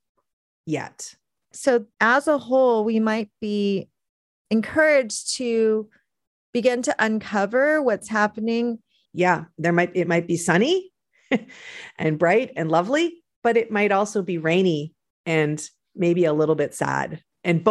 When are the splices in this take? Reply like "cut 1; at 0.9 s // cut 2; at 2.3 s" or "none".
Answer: cut 1; at 1.5 s // cut 2; at 9.1 s